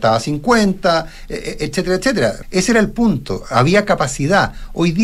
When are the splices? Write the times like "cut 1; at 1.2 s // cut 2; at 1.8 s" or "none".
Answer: cut 1; at 2.4 s